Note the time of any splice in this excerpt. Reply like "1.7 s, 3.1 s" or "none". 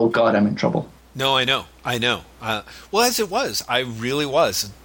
1.0 s